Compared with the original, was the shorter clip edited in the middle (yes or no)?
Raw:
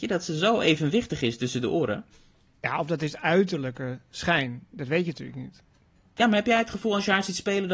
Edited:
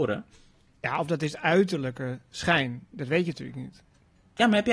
no